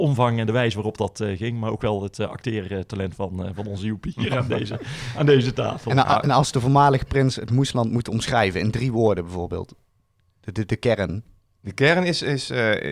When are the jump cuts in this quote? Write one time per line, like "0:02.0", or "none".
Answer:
none